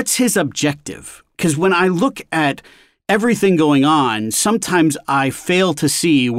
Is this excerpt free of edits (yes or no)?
yes